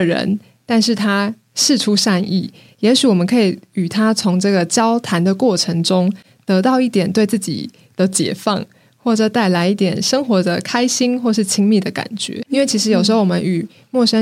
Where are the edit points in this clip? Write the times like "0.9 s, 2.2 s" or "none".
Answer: none